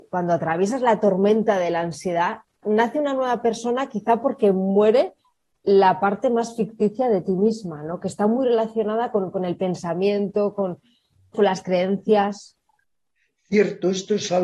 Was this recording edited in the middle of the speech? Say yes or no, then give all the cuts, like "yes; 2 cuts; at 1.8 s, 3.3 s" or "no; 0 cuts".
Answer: yes; 2 cuts; at 2.6 s, 11.3 s